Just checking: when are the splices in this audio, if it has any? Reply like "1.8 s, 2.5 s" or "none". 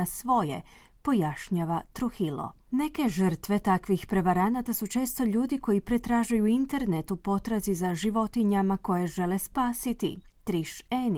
none